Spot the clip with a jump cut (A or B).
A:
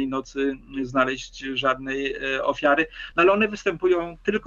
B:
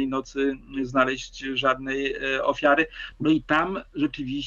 B